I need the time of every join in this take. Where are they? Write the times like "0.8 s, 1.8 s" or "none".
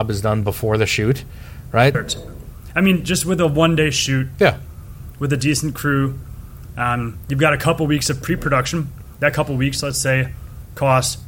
1.9 s

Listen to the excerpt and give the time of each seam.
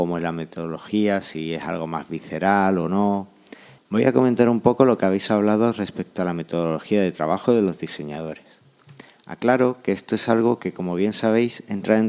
3.8 s

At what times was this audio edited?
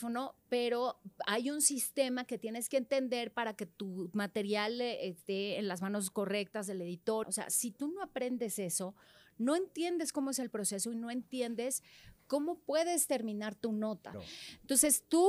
7.2 s, 14.1 s

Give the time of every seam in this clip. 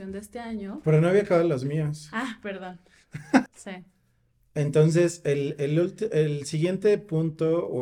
3.5 s

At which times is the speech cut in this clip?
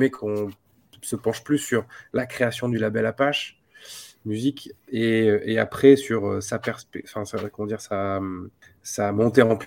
none

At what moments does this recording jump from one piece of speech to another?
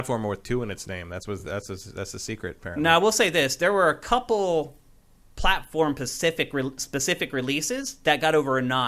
none

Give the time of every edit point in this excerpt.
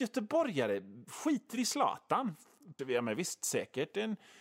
2.8 s

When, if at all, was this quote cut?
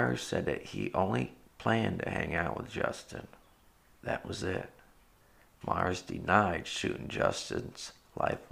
none

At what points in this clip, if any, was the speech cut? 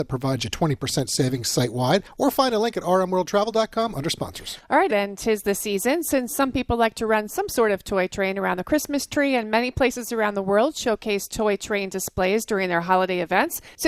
4.9 s

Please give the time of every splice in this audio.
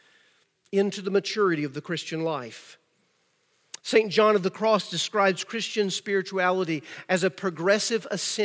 none

